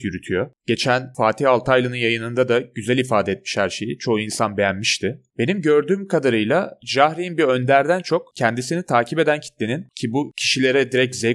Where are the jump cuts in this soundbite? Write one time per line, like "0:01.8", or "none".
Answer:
none